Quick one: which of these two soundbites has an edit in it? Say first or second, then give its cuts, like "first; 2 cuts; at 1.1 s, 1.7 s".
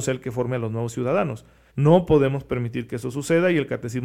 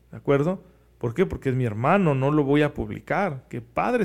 first; 1 cut; at 1.7 s